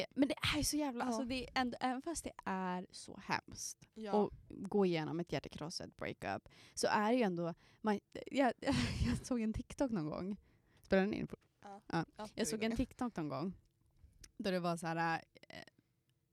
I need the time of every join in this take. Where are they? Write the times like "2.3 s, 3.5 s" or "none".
9.2 s

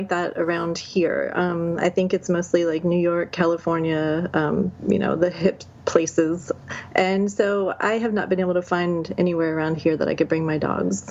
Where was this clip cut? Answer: none

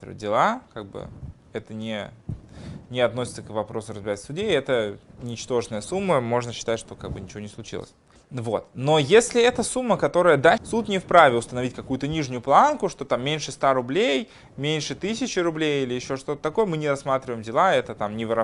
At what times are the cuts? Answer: 8.2 s, 10.6 s

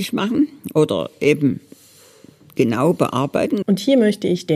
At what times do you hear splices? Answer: 3.6 s

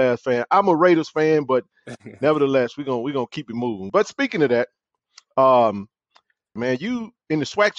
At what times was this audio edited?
3.9 s, 6.6 s

